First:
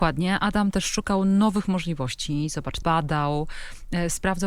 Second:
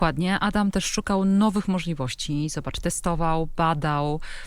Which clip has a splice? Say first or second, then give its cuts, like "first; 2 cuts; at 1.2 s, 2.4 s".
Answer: first; 1 cut; at 2.8 s